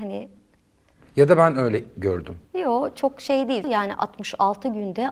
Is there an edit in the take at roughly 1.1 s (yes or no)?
no